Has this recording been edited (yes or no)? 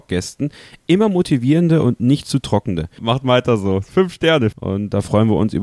yes